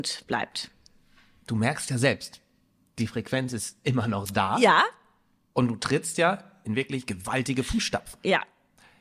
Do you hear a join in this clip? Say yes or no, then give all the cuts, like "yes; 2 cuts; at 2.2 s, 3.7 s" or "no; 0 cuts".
no; 0 cuts